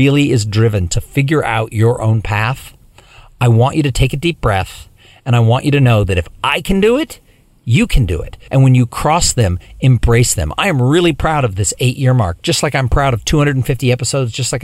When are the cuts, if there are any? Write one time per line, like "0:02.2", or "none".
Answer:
0:08.5

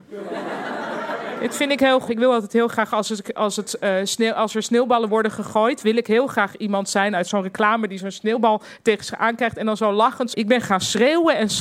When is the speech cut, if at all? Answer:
0:02.1
0:10.3

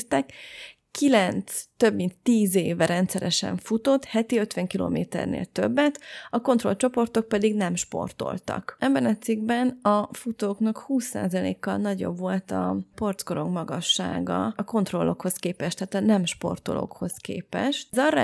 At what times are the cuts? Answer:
none

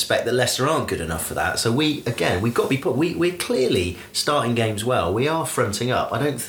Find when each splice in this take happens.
none

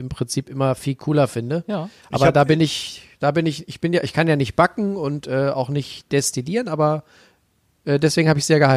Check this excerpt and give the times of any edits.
none

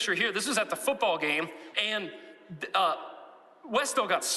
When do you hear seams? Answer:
0:01.7

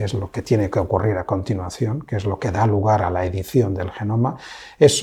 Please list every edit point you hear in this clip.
none

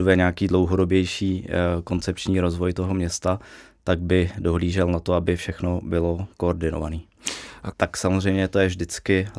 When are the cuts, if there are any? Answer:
0:07.7

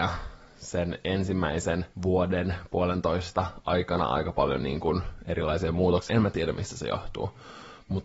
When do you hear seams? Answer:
0:01.9
0:06.1

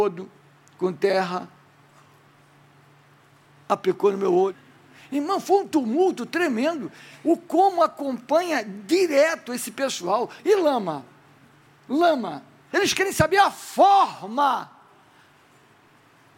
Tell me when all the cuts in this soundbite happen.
0:10.4
0:12.7

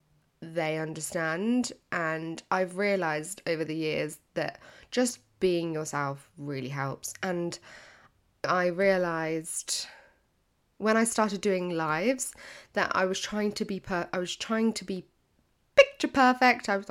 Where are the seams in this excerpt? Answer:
none

